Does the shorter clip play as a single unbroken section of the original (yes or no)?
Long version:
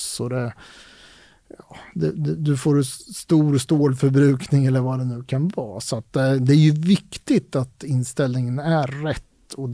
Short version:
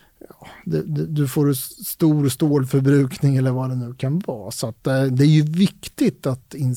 yes